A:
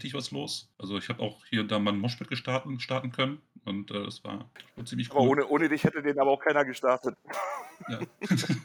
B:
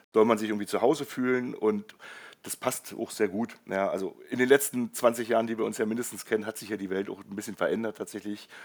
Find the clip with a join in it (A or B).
A